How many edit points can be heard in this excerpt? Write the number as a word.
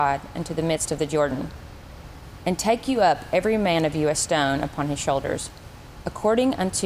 zero